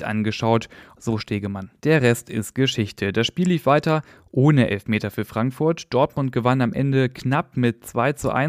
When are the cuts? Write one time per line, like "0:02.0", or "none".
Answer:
0:01.0